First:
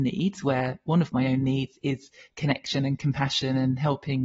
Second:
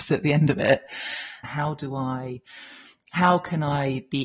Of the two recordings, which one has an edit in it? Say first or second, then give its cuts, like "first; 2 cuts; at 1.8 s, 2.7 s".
second; 1 cut; at 1.4 s